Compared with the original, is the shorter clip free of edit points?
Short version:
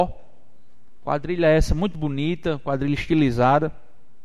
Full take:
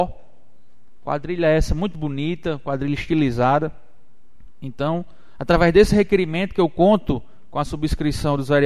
yes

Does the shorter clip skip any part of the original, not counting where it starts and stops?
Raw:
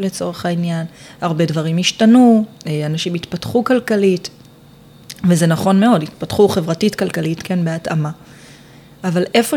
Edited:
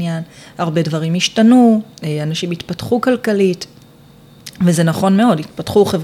no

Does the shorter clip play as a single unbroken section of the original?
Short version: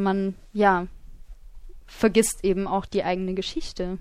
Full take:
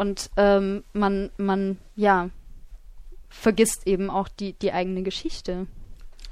no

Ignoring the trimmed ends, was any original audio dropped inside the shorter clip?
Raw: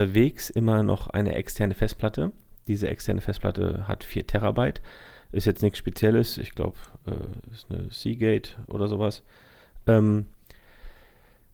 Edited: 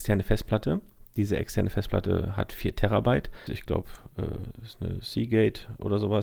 yes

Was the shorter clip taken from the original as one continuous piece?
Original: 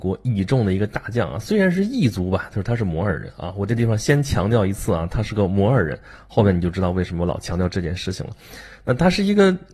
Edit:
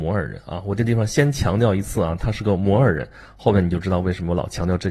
yes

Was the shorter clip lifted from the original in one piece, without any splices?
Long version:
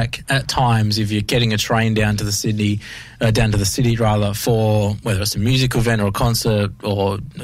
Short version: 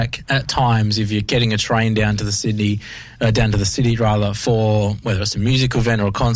yes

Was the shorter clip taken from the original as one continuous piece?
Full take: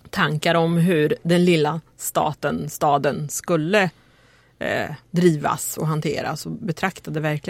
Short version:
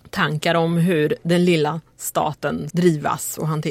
no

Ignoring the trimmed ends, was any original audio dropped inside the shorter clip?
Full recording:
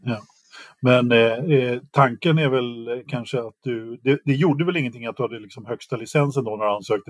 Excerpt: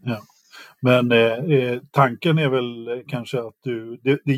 no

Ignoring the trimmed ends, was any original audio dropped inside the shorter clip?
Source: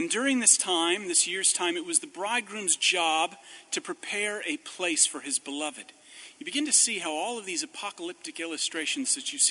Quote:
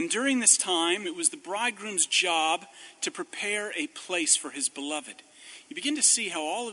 yes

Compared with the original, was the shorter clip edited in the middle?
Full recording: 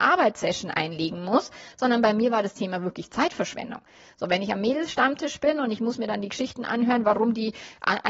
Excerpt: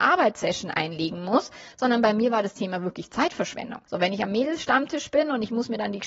yes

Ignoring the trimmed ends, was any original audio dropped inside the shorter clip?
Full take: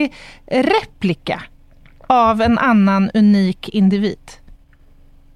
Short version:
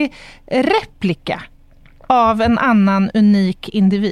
no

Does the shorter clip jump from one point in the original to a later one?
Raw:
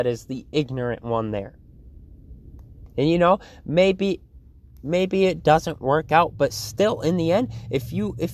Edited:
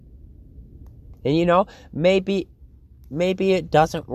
no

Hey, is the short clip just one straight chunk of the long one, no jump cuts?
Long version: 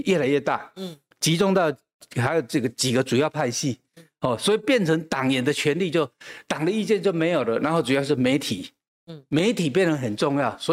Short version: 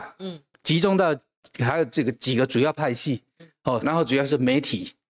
no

